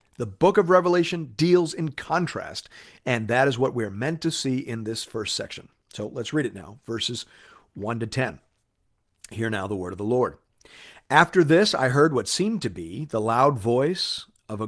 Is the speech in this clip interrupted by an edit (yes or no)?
no